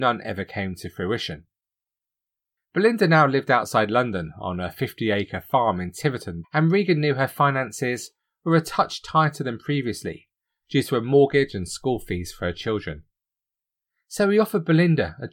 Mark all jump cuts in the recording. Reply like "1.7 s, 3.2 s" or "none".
6.4 s

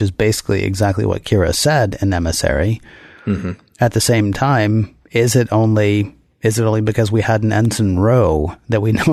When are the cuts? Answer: none

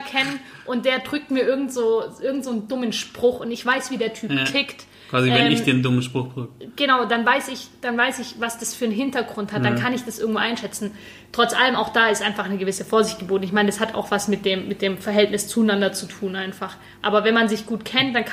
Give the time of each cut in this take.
none

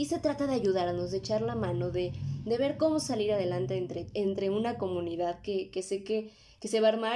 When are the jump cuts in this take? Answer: none

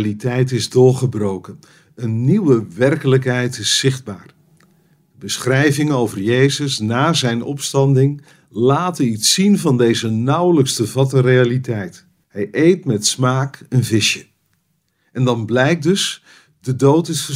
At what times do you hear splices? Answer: 12.2 s

